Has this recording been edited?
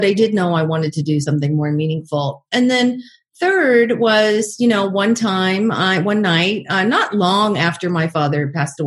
no; 0 cuts

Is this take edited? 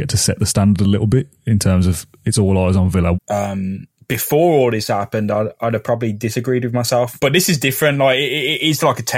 yes; 1 cut; at 3.1 s

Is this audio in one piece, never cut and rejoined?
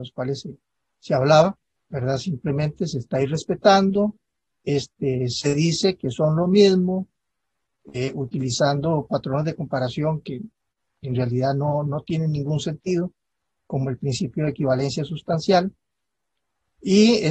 no; 1 cut; at 1.8 s

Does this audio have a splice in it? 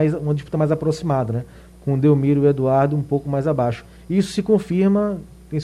no; 0 cuts

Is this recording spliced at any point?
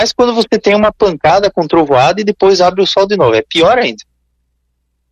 no; 0 cuts

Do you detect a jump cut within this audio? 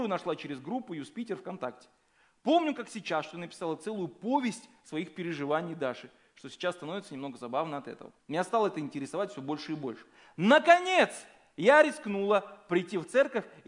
yes; 1 cut; at 8.2 s

